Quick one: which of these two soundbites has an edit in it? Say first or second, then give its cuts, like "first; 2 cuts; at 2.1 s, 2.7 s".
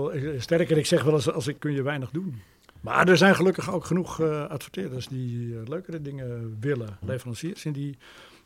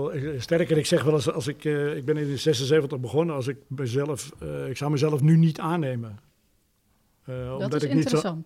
first; 2 cuts; at 1.6 s, 7.0 s